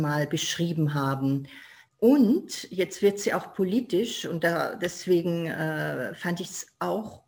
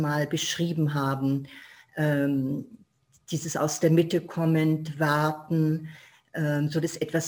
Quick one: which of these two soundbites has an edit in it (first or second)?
first